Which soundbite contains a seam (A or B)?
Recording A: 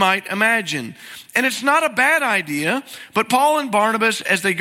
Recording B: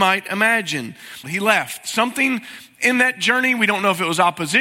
B